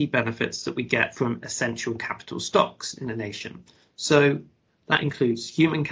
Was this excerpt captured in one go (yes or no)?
yes